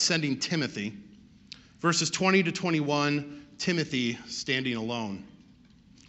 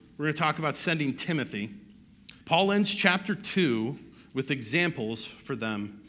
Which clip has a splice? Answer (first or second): second